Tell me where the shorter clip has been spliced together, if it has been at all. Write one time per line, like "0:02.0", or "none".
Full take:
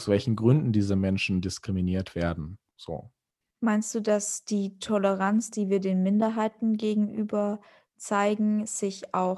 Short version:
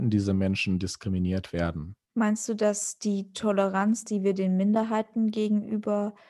0:02.0